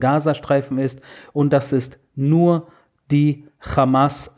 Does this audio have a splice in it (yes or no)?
no